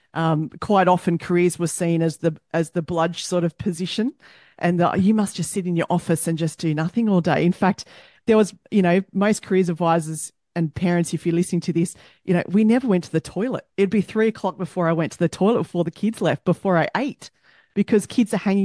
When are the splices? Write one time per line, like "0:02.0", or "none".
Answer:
none

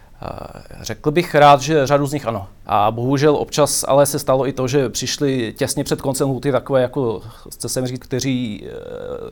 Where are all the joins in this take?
0:02.6
0:08.0

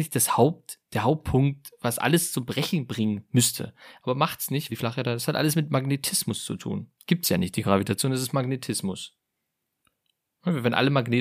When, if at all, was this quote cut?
0:04.7
0:07.0

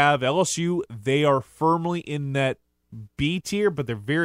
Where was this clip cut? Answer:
none

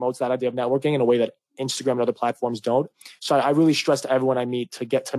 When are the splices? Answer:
none

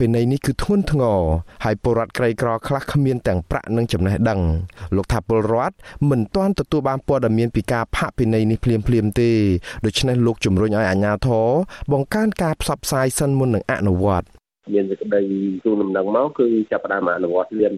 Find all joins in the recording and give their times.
none

